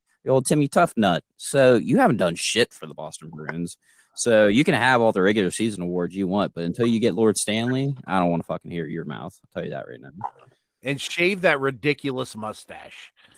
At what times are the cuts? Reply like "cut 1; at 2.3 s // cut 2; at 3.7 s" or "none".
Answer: none